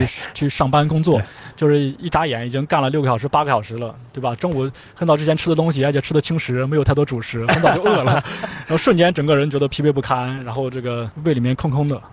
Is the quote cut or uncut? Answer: uncut